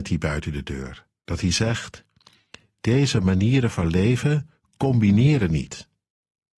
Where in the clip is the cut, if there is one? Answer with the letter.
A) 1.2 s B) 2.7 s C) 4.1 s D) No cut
D